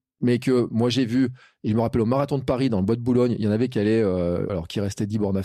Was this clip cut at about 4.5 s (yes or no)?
yes